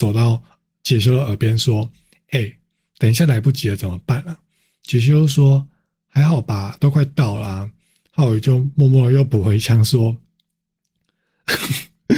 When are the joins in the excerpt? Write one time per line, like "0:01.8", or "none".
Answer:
none